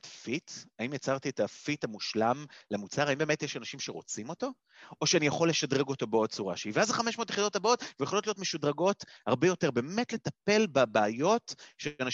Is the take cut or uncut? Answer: uncut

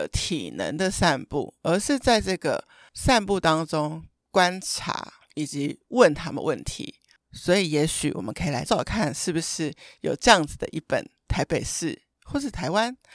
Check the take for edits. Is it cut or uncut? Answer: cut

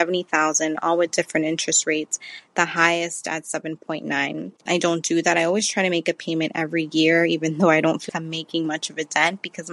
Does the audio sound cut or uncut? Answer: cut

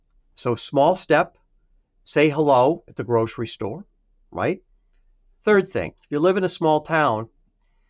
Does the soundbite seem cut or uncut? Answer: cut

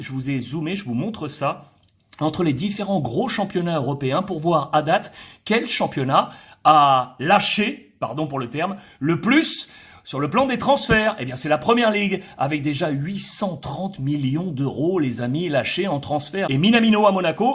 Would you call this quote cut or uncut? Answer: cut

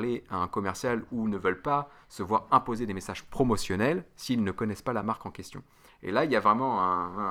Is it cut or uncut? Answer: uncut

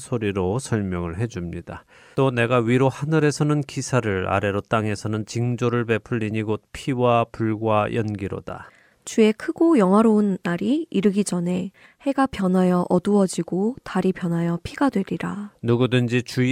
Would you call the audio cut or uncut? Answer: cut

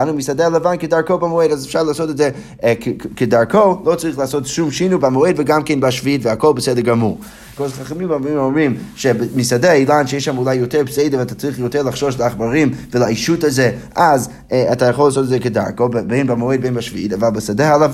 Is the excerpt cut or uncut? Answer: cut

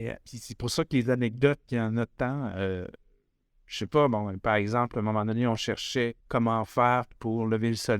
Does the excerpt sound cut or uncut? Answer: cut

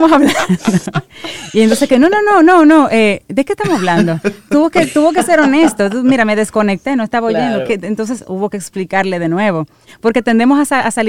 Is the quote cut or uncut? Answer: uncut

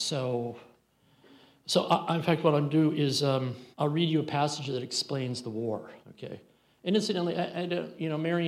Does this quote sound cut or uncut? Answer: cut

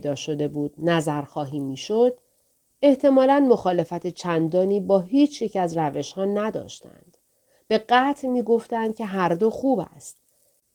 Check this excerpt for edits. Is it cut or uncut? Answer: uncut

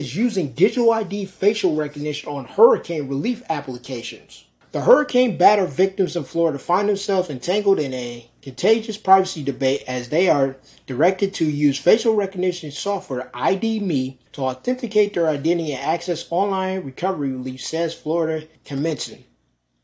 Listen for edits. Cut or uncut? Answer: cut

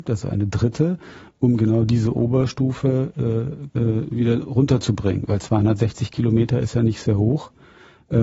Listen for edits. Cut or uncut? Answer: cut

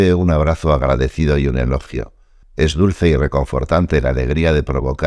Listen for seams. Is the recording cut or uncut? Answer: cut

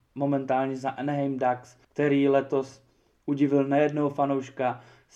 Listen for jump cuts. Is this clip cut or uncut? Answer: cut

